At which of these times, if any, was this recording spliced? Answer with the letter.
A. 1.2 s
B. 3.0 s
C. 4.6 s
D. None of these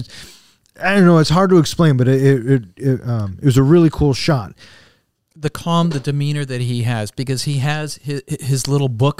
D